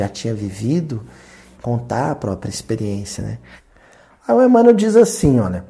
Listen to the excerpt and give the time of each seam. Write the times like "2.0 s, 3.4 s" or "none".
1.5 s